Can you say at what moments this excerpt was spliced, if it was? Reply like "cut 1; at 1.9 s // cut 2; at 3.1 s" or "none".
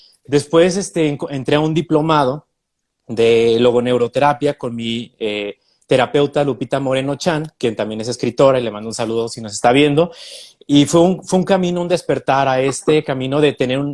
none